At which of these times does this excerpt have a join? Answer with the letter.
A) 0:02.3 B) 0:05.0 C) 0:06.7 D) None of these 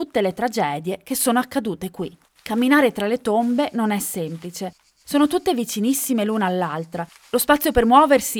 A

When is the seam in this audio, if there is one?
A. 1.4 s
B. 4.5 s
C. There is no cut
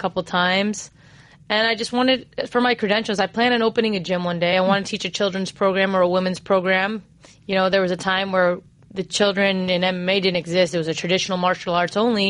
C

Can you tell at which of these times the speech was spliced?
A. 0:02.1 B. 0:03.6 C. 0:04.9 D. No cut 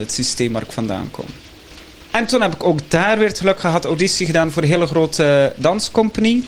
A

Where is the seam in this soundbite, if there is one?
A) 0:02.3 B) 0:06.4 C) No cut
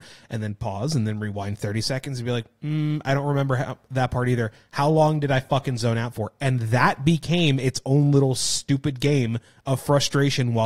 C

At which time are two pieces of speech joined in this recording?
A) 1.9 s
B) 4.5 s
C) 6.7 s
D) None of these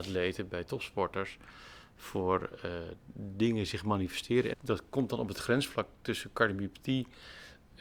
B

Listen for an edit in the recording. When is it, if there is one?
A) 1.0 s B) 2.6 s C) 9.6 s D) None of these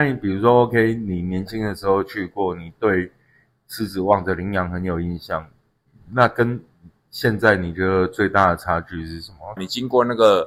C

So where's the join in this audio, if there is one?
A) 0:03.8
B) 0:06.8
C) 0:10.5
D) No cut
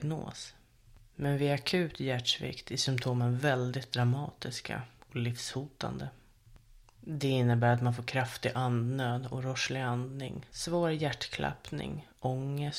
C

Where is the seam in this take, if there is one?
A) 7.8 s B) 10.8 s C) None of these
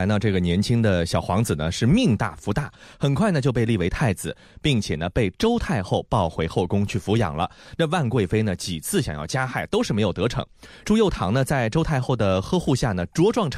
C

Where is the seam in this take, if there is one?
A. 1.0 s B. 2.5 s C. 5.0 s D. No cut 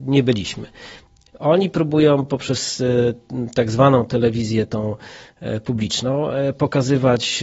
D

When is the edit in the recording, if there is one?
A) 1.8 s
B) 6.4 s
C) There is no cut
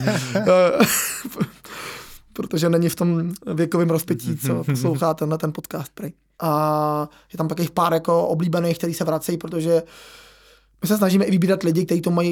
B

